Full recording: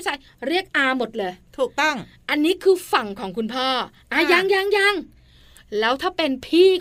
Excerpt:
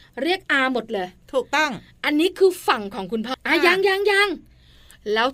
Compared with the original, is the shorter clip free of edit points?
no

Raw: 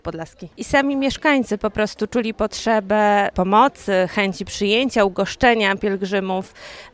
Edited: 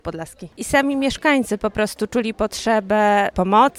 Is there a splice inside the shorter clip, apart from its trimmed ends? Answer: no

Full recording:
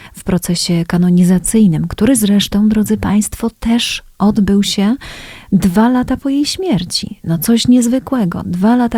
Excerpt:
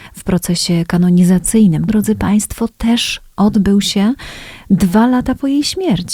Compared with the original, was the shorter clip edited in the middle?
yes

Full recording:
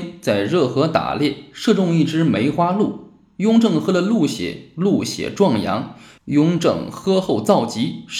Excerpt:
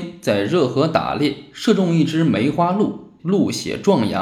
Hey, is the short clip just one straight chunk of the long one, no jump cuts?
no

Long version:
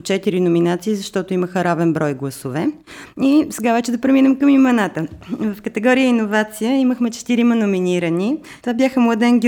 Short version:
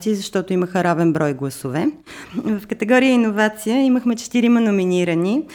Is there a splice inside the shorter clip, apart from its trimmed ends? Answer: yes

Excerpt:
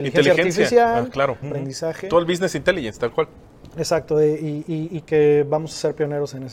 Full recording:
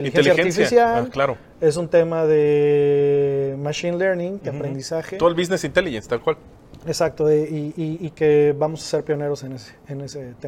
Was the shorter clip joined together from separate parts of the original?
yes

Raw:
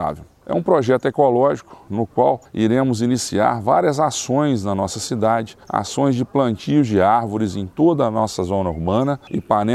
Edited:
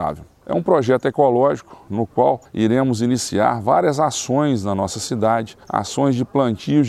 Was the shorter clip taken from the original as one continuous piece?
yes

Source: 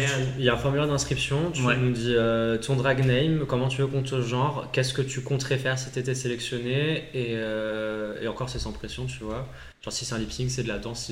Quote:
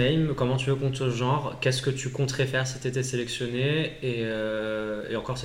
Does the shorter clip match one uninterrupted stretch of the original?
yes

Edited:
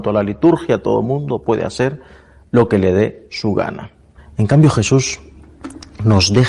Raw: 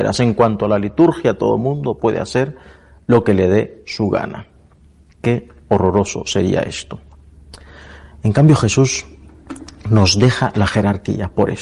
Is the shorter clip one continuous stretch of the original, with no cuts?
no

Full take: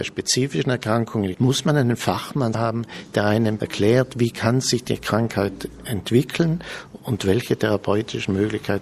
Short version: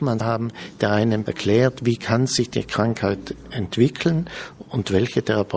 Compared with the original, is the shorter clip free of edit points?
yes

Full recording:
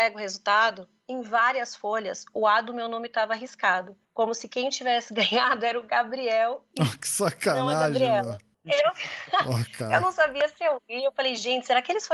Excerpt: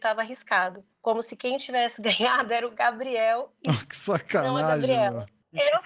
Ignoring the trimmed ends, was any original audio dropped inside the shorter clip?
no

